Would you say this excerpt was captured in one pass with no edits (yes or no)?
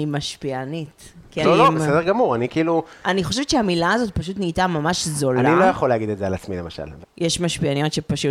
no